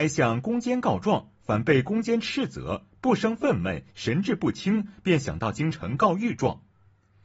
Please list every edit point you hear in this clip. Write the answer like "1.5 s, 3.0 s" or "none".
none

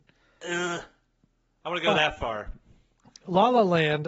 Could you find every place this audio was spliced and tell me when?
none

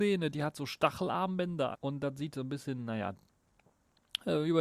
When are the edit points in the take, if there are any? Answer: 1.7 s

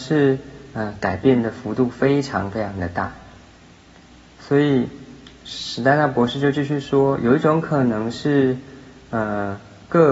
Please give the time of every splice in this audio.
none

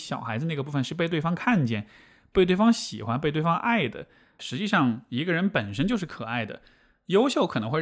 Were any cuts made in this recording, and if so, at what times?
4.4 s

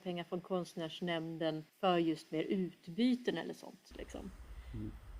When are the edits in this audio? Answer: 1.7 s, 3.9 s

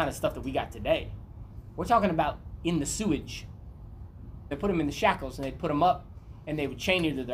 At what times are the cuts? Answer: 4.5 s

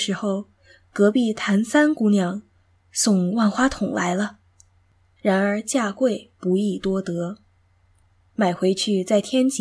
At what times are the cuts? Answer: 5.2 s

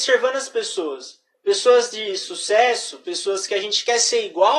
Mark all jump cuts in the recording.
none

